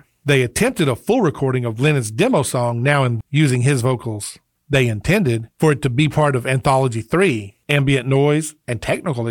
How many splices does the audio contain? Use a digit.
2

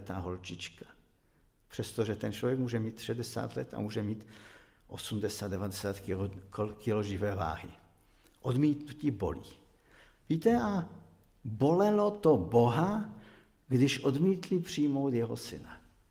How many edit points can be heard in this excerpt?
0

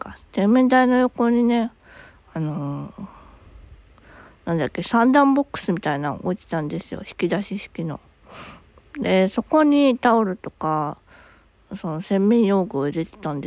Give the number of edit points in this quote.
0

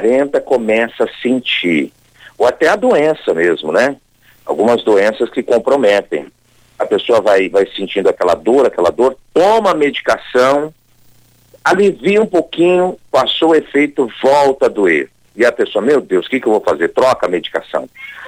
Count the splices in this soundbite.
0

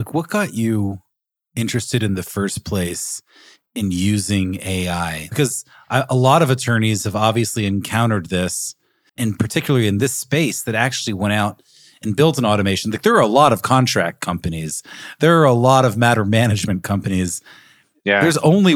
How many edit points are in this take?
1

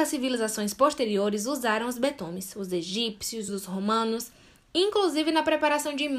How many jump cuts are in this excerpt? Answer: 1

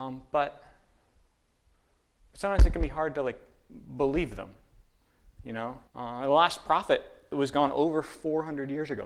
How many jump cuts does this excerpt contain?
2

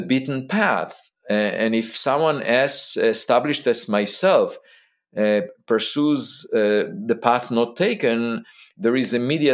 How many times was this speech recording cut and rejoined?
0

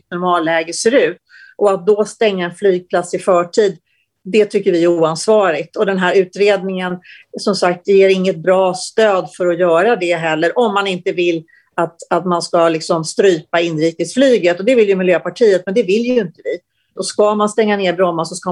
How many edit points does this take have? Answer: 1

